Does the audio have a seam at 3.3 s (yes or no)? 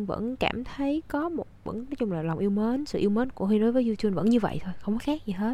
yes